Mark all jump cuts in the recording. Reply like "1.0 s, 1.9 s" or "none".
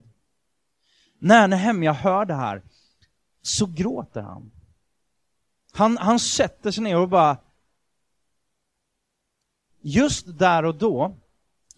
9.7 s